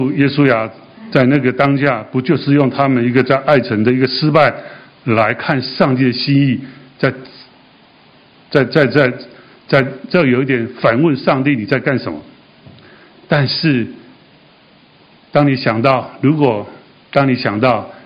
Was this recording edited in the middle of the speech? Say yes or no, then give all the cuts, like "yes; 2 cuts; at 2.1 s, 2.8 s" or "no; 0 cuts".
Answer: no; 0 cuts